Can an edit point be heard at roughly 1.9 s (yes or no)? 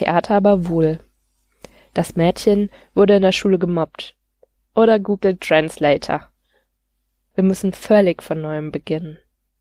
no